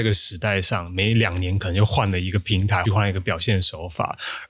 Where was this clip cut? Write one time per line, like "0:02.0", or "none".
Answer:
0:02.8